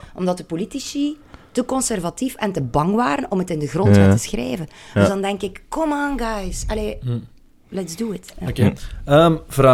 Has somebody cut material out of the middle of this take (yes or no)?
no